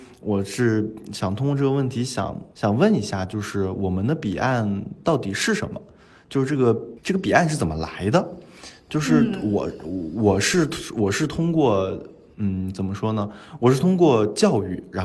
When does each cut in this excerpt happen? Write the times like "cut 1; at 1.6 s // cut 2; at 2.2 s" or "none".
none